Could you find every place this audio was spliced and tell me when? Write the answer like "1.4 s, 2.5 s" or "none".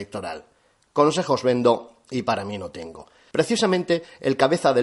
3.3 s